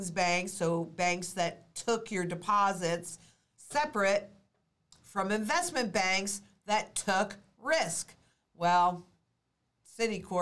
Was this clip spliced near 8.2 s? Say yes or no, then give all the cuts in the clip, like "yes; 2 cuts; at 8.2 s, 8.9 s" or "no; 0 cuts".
no; 0 cuts